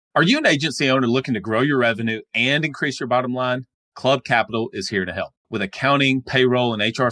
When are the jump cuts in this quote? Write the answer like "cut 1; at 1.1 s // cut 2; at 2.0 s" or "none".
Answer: cut 1; at 5.4 s

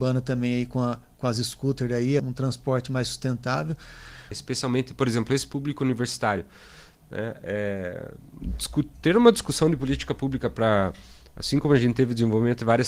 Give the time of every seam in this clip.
cut 1; at 2.2 s // cut 2; at 4.3 s

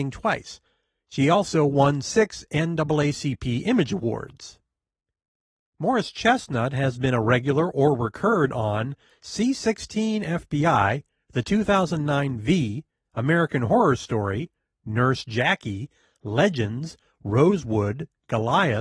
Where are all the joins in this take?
none

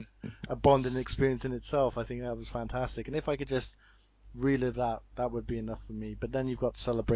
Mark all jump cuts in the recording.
none

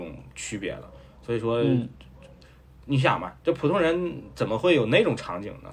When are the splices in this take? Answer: none

